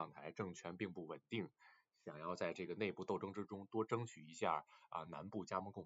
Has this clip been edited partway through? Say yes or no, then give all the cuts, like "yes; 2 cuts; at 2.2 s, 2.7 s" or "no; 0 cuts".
no; 0 cuts